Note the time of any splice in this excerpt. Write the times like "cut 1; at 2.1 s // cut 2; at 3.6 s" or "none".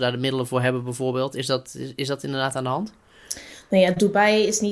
none